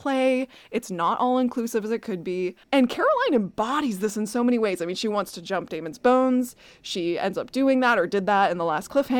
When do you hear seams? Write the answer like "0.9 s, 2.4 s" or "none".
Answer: 2.6 s